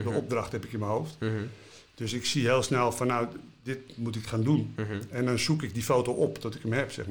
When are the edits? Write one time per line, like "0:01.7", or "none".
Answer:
none